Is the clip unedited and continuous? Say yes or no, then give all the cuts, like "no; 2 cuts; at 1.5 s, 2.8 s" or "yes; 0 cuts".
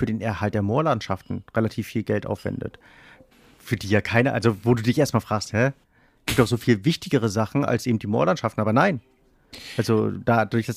yes; 0 cuts